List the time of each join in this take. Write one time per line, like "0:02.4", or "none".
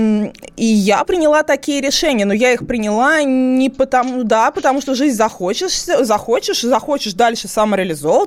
0:01.0